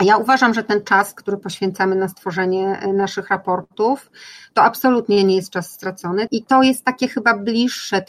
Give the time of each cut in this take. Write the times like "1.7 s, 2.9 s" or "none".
6.3 s